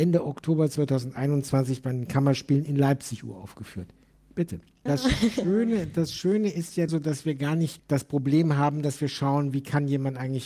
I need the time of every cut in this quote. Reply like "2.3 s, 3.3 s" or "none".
4.9 s, 6.9 s